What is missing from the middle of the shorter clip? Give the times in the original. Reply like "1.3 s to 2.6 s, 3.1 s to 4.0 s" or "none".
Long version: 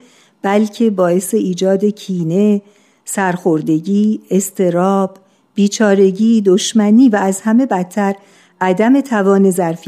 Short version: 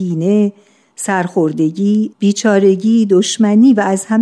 4.2 s to 5.5 s